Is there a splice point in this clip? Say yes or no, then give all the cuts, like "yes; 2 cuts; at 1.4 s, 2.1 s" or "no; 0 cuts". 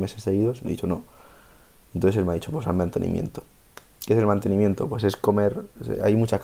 no; 0 cuts